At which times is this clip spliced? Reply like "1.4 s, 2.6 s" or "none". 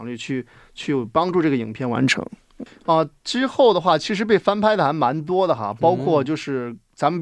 2.7 s